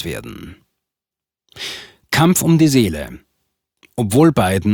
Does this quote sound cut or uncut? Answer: uncut